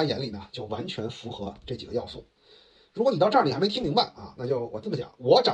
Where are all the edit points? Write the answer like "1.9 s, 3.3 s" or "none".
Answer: none

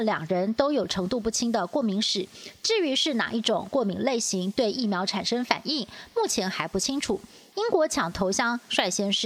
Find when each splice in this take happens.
7.5 s

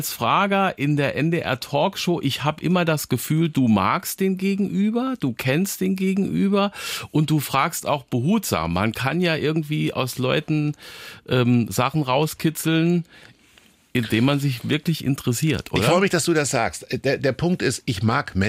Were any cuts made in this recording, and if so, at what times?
none

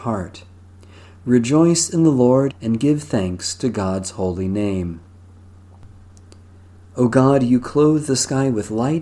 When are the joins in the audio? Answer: 2.5 s

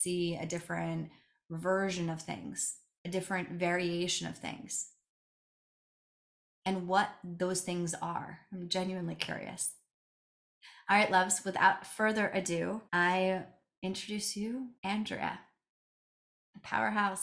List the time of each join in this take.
12.9 s, 14.8 s

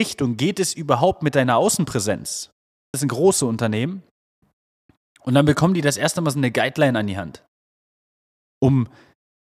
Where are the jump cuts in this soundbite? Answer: 2.9 s

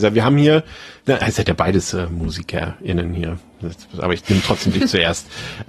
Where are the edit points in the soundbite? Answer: 1.0 s

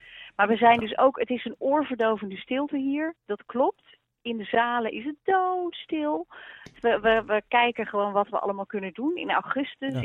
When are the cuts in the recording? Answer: 6.7 s

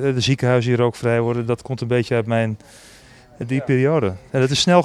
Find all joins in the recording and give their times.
3.4 s

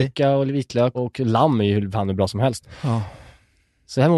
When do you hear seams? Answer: 0.9 s

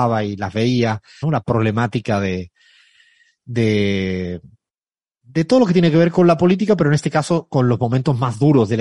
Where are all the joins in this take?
1.2 s

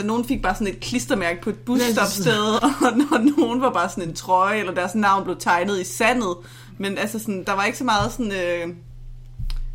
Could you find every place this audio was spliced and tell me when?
2.6 s, 7.4 s

